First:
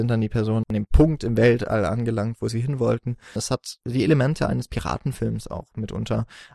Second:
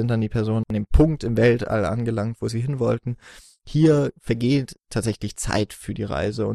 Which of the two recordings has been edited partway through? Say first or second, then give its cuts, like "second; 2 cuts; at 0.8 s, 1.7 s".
first; 1 cut; at 3.4 s